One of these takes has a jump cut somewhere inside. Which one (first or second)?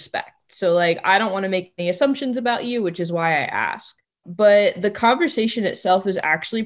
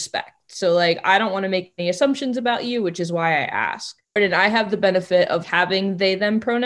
second